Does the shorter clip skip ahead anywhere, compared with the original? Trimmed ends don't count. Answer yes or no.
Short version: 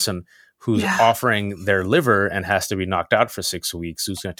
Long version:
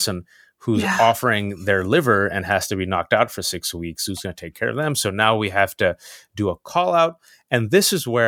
no